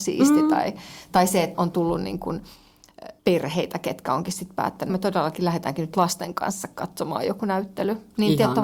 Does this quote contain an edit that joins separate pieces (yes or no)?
yes